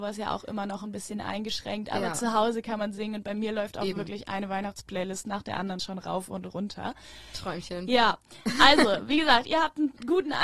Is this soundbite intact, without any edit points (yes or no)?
yes